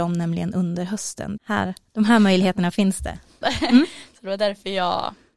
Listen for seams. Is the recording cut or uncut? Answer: cut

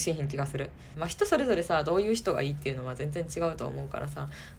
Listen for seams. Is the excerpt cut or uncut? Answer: cut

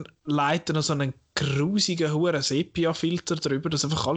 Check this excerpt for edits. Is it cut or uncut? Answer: uncut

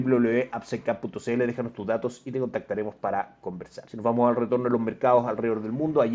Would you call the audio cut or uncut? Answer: uncut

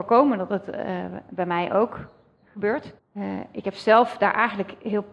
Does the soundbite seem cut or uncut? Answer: cut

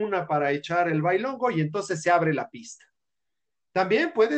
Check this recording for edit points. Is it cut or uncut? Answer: uncut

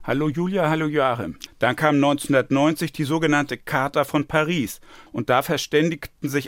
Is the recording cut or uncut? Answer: cut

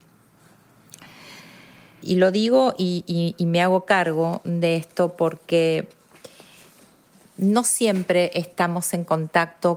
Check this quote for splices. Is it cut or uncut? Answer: cut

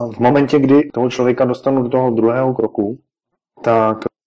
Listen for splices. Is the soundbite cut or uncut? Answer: uncut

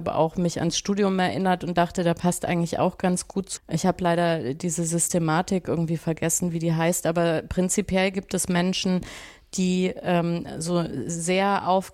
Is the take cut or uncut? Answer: cut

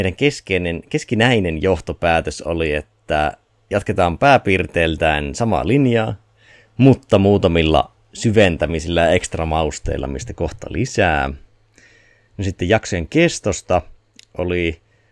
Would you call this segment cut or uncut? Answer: uncut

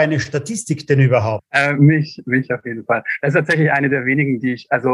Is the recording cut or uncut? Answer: uncut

